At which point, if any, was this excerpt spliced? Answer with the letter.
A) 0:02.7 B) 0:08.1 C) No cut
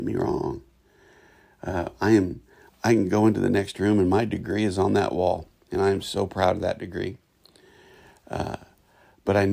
A